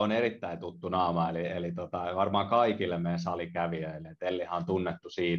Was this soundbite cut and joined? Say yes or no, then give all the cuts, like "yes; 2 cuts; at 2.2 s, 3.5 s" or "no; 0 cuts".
no; 0 cuts